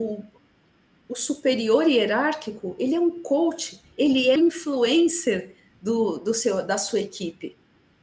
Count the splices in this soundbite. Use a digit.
1